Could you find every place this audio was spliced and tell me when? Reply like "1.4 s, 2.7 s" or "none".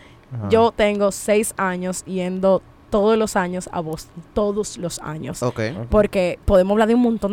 5.9 s